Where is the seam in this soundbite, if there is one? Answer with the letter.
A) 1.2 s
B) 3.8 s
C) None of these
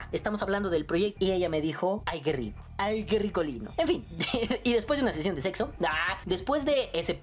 A